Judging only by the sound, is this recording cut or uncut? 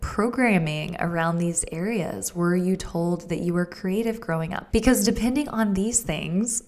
cut